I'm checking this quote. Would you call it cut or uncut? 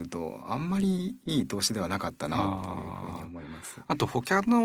uncut